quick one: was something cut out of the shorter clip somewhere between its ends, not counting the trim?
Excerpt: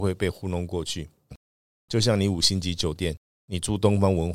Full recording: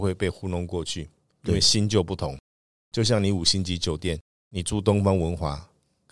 yes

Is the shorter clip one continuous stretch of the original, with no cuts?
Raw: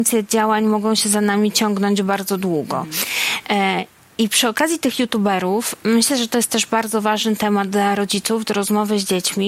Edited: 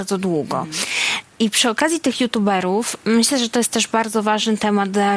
no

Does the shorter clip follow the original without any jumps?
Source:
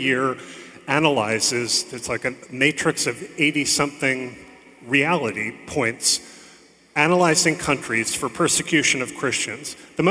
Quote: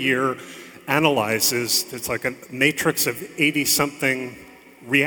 yes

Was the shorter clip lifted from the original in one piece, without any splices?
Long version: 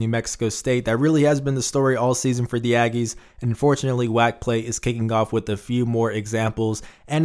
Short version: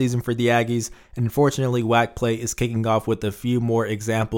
yes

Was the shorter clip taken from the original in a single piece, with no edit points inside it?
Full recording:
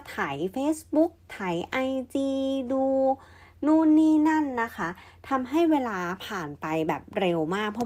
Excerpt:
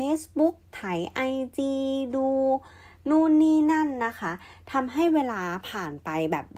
yes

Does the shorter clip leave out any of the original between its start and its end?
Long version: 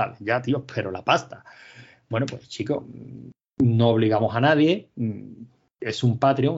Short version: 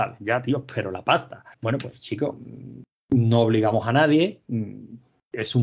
yes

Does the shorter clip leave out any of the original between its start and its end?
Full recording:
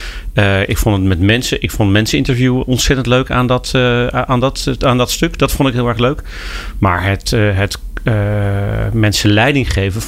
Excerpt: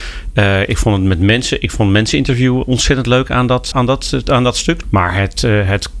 yes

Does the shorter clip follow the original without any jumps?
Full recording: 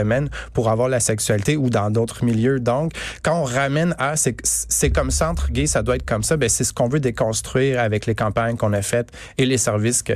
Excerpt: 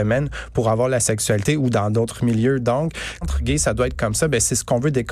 no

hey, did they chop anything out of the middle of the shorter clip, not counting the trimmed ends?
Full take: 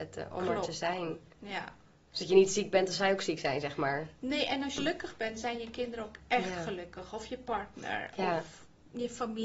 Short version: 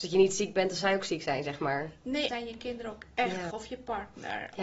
yes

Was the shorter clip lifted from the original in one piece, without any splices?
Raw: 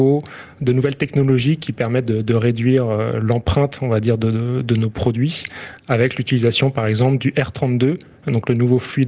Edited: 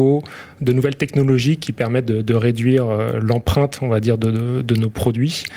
yes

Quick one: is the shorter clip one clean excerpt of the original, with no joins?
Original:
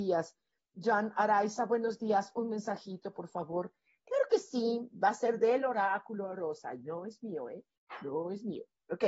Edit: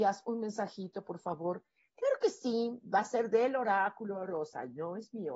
yes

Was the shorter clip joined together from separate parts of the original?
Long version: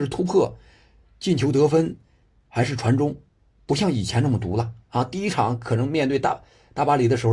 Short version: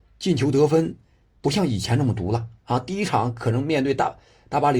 yes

